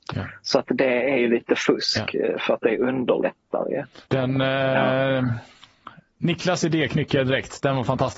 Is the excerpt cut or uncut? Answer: cut